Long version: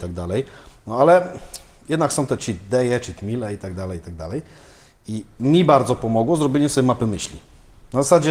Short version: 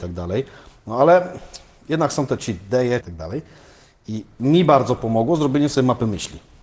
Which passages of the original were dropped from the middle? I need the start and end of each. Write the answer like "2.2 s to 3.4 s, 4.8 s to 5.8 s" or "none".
3.0 s to 4.0 s

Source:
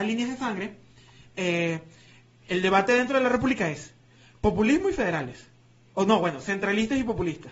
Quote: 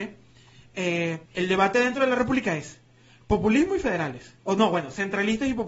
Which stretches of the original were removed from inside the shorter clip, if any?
1.9 s to 2.4 s, 5.5 s to 5.9 s

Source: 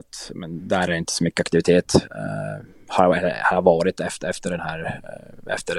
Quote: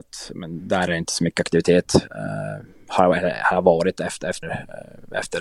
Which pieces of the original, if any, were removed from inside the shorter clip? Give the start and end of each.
4.4 s to 4.8 s

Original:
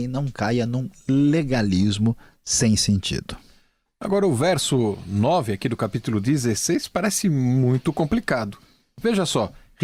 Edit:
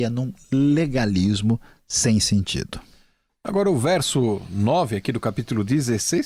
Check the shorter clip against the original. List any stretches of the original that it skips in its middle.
none

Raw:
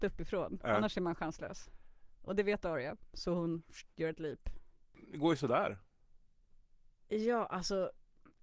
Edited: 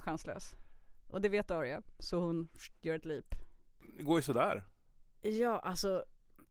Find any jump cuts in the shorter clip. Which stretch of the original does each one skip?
6.2 s to 7.0 s

